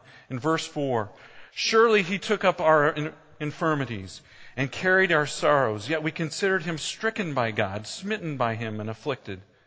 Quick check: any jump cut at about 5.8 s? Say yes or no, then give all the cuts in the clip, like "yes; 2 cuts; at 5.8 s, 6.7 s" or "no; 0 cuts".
no; 0 cuts